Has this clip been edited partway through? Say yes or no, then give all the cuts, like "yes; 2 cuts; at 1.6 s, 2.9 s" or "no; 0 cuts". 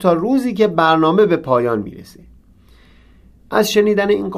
no; 0 cuts